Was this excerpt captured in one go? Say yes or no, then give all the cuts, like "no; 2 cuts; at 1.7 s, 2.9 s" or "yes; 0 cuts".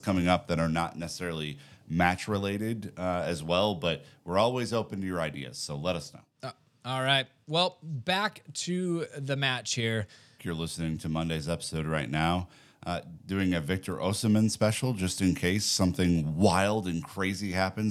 no; 2 cuts; at 10.4 s, 13.2 s